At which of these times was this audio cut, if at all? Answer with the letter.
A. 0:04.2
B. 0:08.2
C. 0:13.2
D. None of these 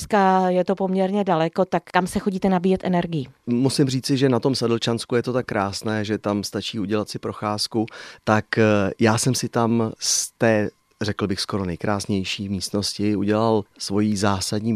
B